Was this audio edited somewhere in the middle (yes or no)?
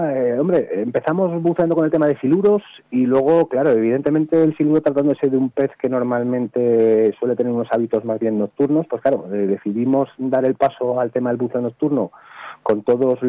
no